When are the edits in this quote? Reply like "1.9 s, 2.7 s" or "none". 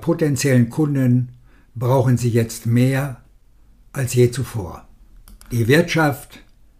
5.4 s